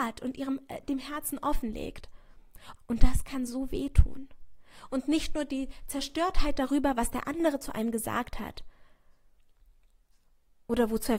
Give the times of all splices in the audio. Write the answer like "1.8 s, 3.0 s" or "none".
2.8 s